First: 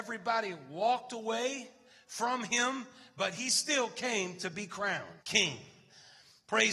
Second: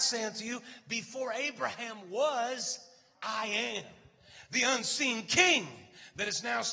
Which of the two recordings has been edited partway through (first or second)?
first